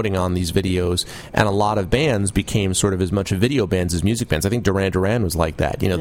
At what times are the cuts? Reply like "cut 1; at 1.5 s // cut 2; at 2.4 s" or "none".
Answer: none